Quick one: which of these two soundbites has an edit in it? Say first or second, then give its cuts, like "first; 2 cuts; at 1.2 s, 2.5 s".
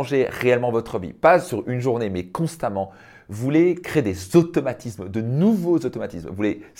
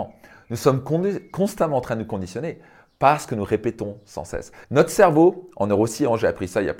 second; 1 cut; at 4.6 s